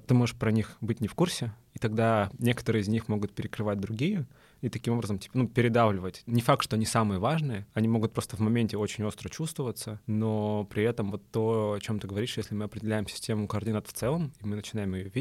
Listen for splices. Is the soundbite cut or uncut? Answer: cut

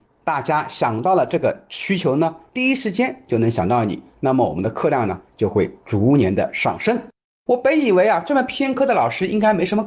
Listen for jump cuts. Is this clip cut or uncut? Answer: cut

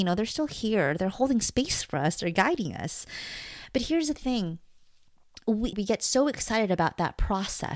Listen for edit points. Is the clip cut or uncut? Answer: cut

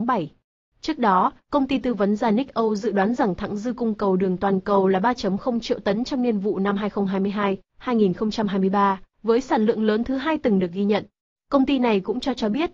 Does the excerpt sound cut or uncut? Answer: uncut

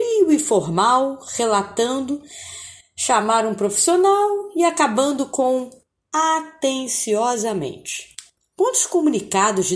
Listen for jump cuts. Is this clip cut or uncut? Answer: cut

